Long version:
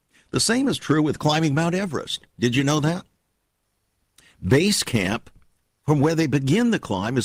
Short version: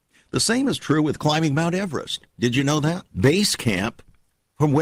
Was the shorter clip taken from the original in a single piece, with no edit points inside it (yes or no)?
no